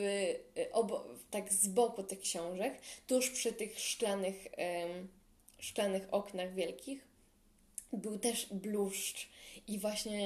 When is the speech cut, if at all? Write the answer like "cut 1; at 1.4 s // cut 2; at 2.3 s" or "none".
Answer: none